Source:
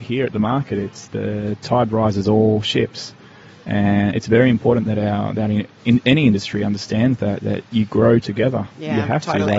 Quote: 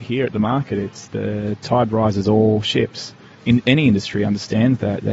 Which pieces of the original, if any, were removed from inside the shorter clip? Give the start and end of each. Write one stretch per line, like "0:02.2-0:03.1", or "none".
0:03.3-0:05.7